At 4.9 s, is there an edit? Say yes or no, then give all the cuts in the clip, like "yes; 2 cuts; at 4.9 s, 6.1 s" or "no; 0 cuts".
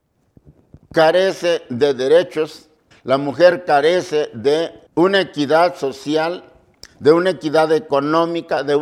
yes; 2 cuts; at 2.9 s, 4.9 s